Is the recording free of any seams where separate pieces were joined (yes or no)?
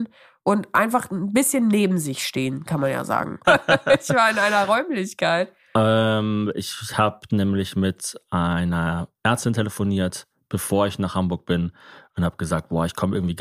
no